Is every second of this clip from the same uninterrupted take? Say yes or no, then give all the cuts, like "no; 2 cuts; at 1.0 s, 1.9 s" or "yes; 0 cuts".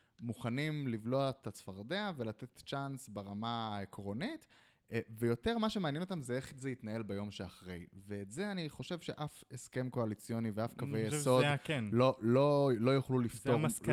yes; 0 cuts